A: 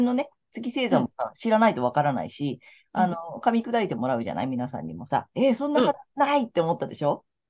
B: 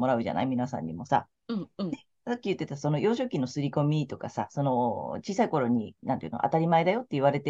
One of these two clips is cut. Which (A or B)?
A